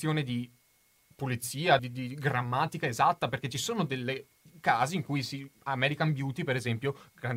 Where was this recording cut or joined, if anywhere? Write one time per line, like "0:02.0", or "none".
0:01.8